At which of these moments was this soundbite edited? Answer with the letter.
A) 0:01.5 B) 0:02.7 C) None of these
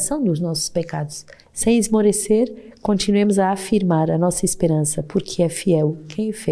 A